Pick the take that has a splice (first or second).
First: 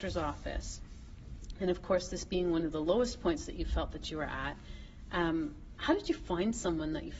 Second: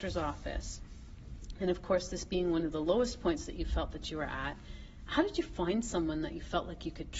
second